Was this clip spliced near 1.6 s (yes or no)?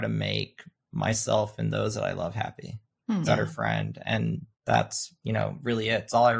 no